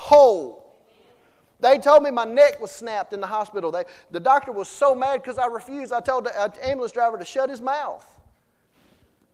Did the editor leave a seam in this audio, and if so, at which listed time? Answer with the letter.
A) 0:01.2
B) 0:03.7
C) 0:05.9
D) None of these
D